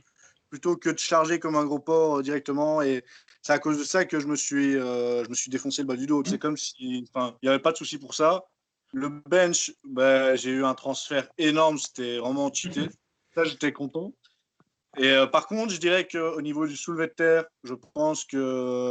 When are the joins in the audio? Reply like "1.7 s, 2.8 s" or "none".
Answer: 6.2 s, 7.4 s